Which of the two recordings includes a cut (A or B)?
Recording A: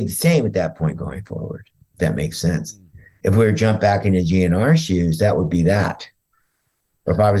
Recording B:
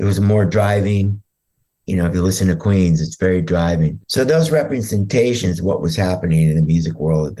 B